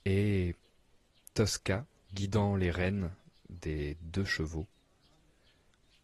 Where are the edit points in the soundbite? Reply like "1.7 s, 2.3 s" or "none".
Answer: 2.1 s